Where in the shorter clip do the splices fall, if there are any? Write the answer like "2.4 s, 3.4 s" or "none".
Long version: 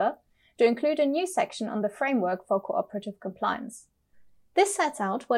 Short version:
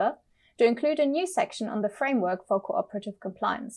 none